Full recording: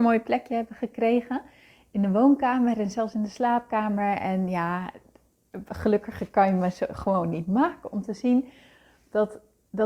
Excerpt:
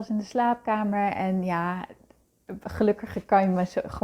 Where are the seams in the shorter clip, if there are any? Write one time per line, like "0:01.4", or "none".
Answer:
none